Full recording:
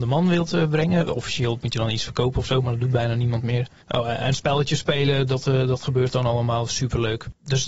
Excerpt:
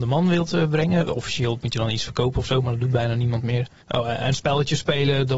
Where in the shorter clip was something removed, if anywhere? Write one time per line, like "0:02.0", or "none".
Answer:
none